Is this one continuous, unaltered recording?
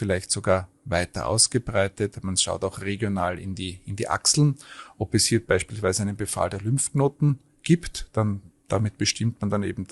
yes; 0 cuts

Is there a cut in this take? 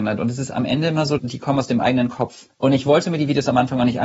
yes; 2 cuts; at 1.2 s, 2.5 s

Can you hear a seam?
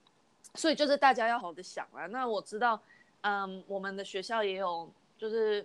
yes; 1 cut; at 1.4 s

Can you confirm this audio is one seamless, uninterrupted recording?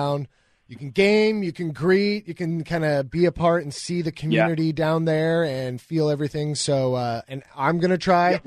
yes; 0 cuts

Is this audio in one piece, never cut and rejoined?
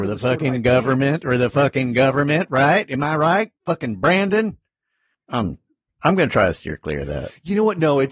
no; 1 cut; at 3.6 s

